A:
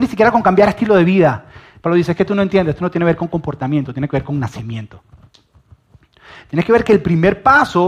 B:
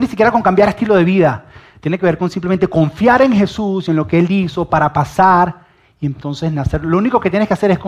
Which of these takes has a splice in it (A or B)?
A